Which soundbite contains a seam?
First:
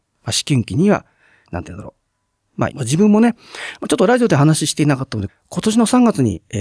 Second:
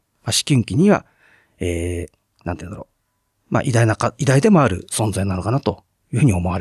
first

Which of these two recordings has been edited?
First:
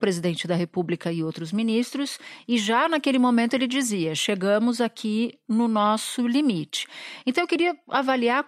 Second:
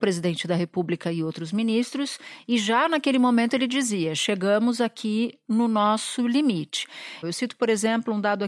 second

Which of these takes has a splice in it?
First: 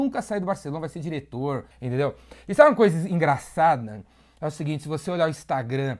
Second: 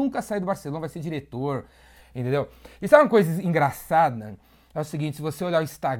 first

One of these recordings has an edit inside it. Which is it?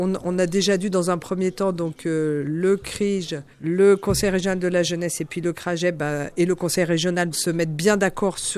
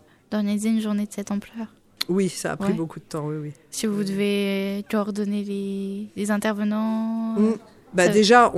first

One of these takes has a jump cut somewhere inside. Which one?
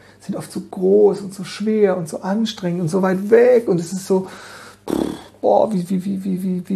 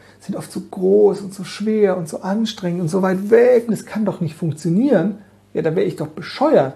second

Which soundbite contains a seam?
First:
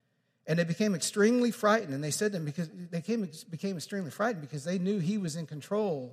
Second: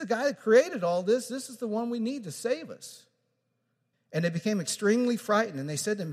second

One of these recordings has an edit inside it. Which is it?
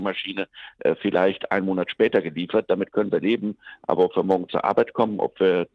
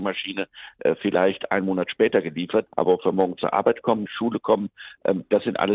second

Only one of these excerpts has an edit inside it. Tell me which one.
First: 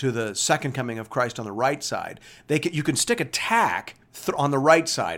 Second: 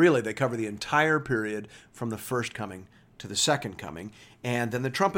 first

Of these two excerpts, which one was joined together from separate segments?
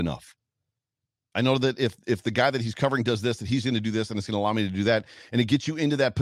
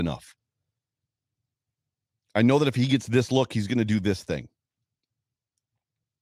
first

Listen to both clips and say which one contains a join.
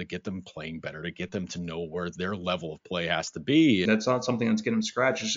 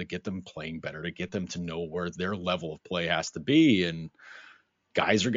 first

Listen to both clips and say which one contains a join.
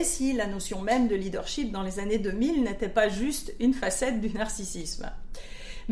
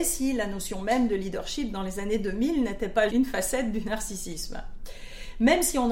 second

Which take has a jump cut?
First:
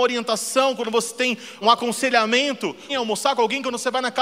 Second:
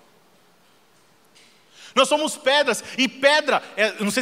first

